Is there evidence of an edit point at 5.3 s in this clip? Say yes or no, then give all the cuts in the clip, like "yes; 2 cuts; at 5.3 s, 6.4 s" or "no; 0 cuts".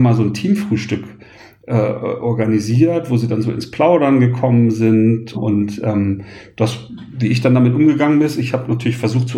yes; 1 cut; at 5.3 s